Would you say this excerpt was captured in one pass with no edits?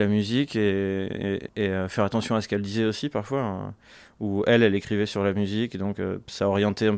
no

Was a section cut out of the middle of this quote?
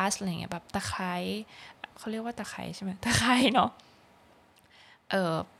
yes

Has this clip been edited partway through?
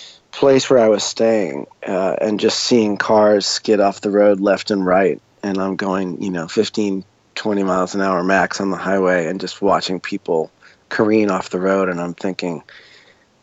no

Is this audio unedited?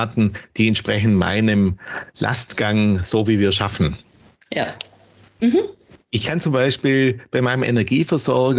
no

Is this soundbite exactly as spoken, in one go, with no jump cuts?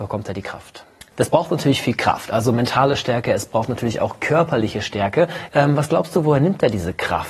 no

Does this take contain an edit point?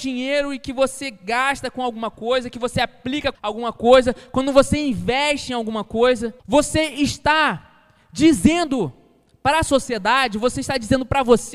yes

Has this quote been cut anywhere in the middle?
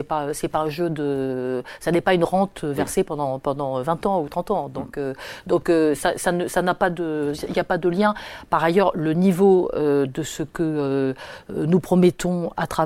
no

